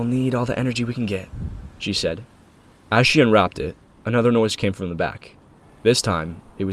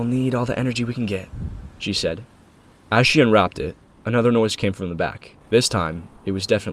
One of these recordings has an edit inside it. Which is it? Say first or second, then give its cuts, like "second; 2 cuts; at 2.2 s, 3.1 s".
second; 1 cut; at 5.4 s